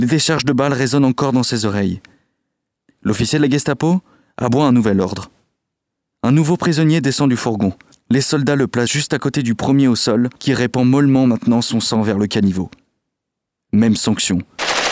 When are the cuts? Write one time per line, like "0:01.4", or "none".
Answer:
none